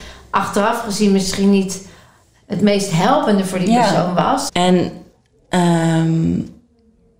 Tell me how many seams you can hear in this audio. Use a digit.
1